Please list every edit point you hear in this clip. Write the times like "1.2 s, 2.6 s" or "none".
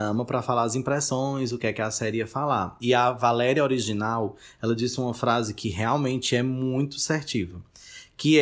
none